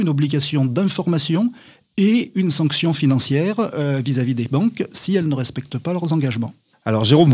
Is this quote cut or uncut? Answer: uncut